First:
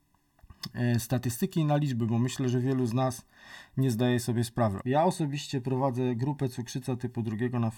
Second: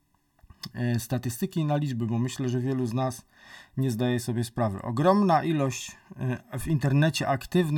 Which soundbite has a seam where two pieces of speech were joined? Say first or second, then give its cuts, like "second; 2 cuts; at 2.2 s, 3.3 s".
first; 1 cut; at 4.8 s